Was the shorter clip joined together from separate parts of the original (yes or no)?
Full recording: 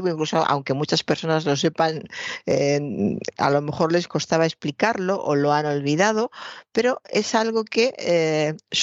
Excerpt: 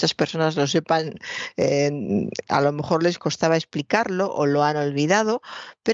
no